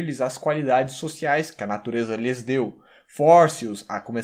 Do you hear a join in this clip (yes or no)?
no